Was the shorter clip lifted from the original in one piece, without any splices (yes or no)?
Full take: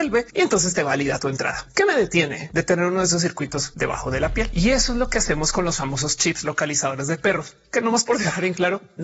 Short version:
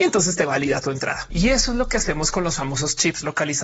no